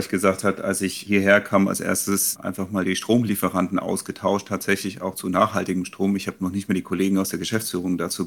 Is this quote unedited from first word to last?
yes; 0 cuts

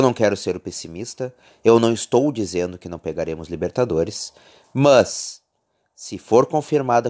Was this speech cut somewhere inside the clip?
no; 0 cuts

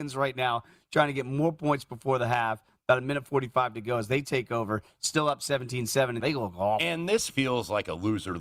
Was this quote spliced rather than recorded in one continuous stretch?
yes; 2 cuts; at 6.2 s, 7.3 s

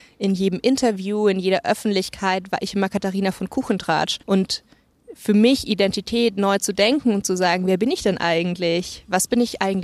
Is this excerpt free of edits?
no; 1 cut; at 4.2 s

